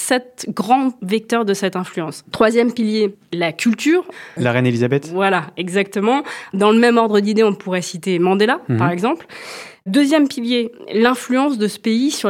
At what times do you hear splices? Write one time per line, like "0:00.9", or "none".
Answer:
0:02.3
0:04.4